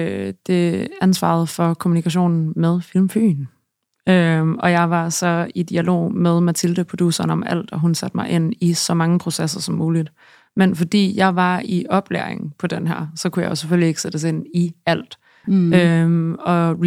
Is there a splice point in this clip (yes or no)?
yes